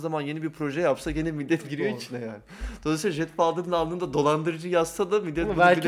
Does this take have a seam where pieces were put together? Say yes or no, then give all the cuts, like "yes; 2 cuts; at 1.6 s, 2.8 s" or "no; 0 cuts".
yes; 1 cut; at 1.6 s